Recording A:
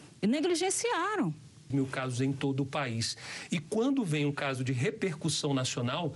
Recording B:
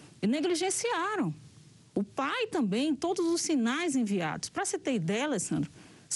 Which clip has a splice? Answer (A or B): A